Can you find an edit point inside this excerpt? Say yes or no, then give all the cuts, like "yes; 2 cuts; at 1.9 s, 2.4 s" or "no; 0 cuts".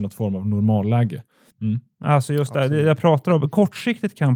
yes; 1 cut; at 1.5 s